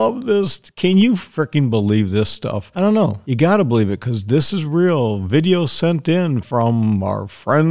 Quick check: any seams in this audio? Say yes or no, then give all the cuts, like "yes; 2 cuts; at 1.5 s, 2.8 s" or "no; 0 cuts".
no; 0 cuts